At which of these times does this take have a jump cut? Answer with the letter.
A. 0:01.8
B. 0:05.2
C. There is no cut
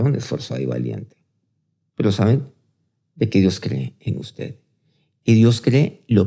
C